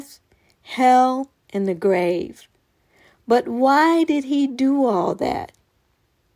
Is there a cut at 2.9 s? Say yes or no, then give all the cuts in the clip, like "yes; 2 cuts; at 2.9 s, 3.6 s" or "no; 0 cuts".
no; 0 cuts